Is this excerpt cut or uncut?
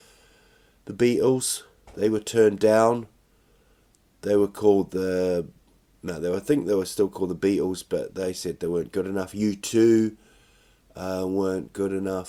uncut